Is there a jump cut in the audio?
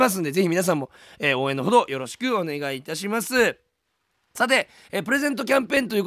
no; 0 cuts

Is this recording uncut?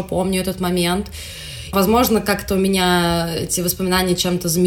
no; 1 cut; at 1.7 s

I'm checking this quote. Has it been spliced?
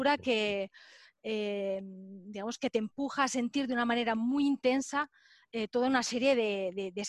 no; 0 cuts

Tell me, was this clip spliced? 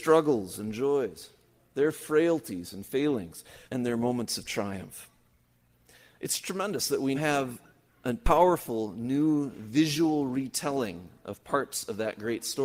yes; 2 cuts; at 3.7 s, 7.1 s

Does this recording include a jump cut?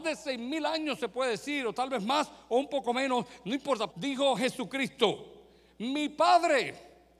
yes; 1 cut; at 3.9 s

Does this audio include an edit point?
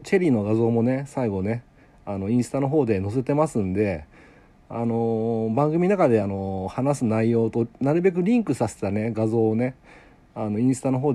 no; 0 cuts

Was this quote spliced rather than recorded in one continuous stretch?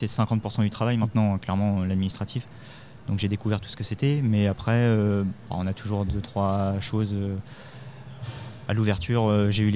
no; 0 cuts

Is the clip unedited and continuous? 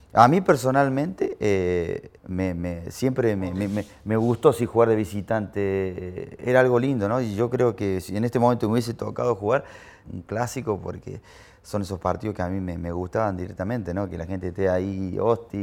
no; 2 cuts; at 2.2 s, 10.0 s

